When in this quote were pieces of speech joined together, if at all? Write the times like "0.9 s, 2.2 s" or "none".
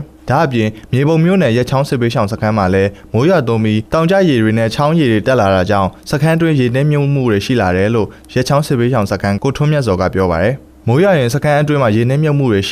9.4 s